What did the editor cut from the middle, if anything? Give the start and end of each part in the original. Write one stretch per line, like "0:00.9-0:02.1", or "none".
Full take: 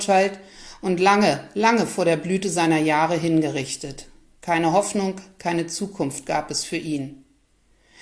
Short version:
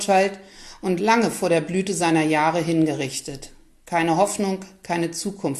0:01.0-0:01.5

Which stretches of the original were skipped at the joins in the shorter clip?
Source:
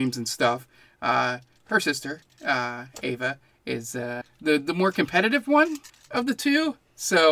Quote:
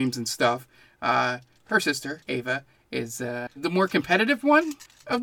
0:02.3-0:03.0
0:04.3-0:04.6

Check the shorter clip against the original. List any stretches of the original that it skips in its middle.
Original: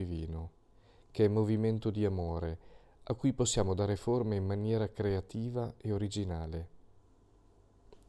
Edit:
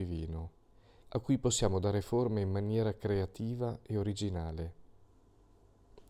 0:01.0-0:03.0

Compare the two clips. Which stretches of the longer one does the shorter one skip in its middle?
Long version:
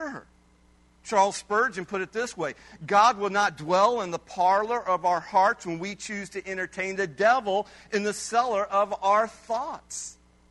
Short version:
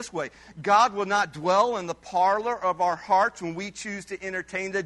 none

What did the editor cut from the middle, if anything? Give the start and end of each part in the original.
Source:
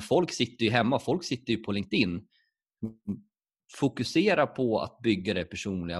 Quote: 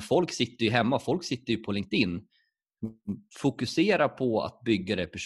0:03.3-0:03.6

